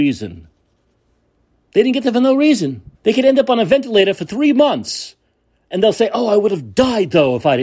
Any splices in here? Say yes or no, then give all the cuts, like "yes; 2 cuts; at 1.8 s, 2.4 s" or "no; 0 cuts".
yes; 1 cut; at 2.9 s